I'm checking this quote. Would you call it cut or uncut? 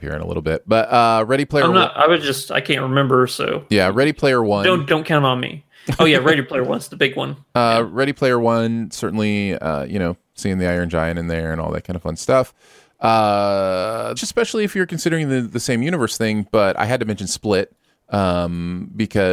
cut